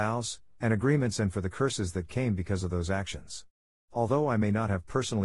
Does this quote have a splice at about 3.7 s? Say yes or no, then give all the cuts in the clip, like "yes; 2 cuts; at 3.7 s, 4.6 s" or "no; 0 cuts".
no; 0 cuts